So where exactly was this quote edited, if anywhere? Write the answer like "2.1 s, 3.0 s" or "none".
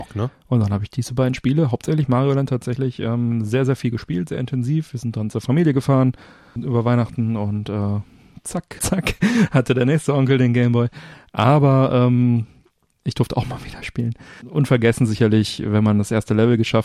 6.6 s, 8.8 s